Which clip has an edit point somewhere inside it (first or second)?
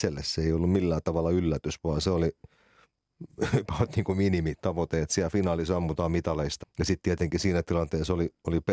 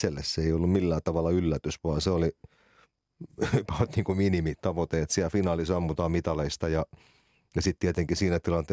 first